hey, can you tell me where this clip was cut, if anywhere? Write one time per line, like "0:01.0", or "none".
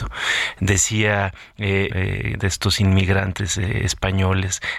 0:01.9